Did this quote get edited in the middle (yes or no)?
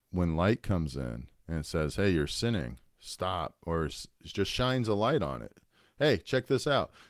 no